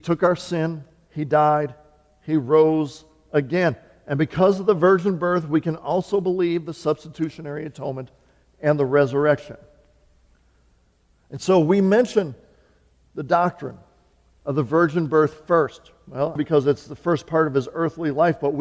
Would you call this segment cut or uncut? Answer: cut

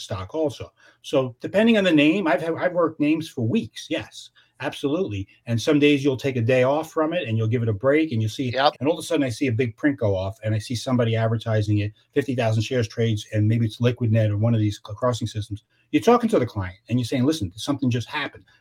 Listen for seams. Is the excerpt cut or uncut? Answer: cut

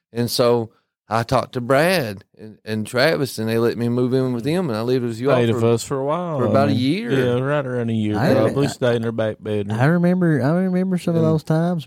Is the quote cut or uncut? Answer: uncut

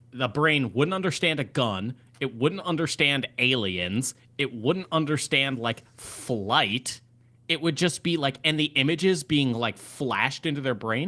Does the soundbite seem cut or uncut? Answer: uncut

